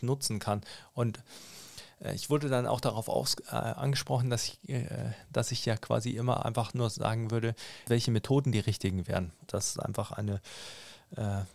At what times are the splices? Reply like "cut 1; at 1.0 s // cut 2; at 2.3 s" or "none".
cut 1; at 7.9 s // cut 2; at 9.5 s